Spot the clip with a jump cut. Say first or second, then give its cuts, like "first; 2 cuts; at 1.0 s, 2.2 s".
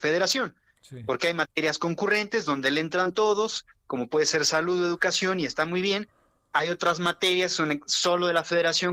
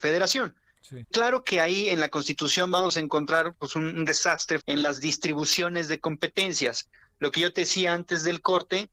second; 2 cuts; at 1.0 s, 4.6 s